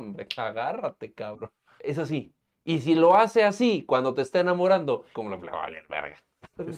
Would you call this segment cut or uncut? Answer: cut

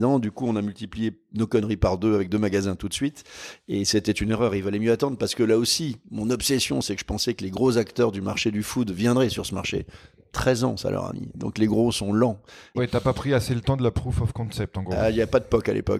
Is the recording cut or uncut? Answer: cut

